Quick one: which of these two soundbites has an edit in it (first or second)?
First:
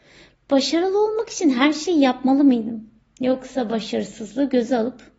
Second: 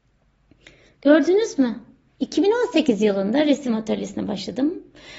second